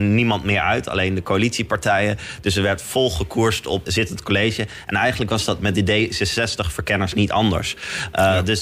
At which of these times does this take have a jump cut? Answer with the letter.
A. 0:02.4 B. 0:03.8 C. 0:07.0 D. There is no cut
B